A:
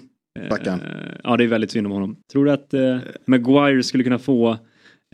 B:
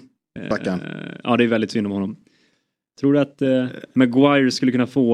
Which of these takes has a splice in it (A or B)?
A